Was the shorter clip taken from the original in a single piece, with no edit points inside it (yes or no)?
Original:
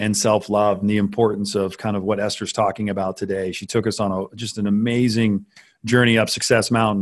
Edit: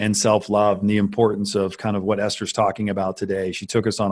yes